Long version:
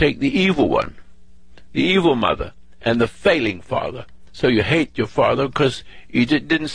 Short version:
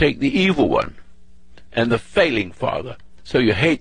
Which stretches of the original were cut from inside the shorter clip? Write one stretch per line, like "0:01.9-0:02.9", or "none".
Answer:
0:01.7-0:02.8